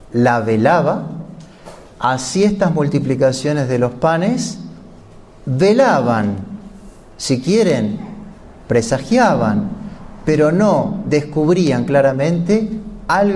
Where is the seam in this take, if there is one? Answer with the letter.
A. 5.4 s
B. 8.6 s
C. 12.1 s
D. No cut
D